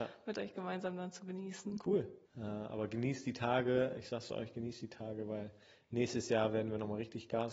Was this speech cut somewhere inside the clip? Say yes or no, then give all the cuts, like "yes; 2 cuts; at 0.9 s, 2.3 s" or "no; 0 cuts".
yes; 1 cut; at 2.3 s